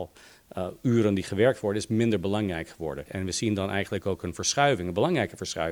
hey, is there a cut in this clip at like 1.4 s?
no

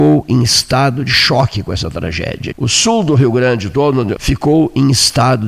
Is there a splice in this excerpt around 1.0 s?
no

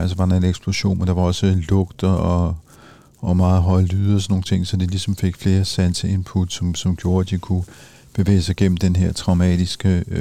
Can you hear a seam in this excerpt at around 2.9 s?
no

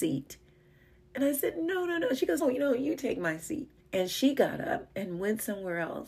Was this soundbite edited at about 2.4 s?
yes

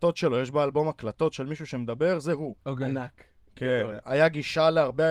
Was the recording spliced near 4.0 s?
yes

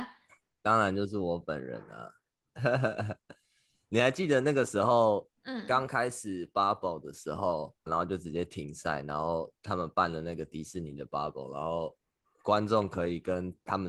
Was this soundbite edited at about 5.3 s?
yes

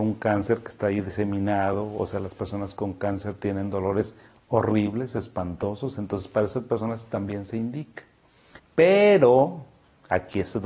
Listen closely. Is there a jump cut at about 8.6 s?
yes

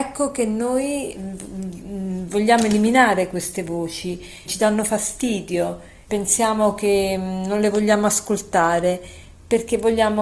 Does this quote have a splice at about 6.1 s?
yes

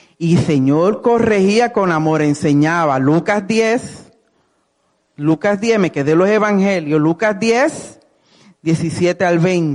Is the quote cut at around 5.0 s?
no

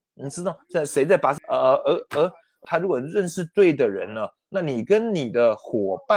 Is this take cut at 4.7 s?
no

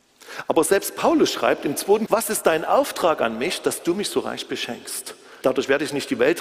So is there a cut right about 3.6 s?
no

